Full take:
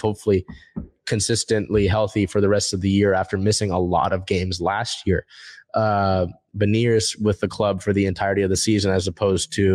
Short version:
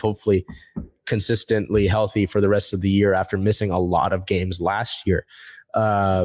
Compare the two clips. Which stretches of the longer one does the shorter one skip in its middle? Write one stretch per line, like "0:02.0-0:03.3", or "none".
none